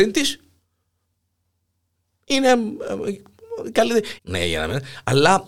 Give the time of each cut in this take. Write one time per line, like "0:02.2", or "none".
0:04.2